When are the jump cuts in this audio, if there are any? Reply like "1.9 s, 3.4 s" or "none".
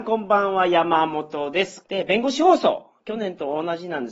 1.8 s